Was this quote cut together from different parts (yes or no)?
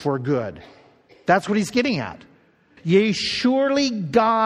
yes